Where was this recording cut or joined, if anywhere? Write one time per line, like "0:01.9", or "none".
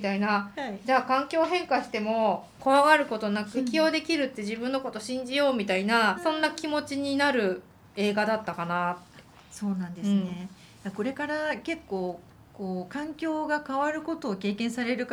0:03.5
0:06.1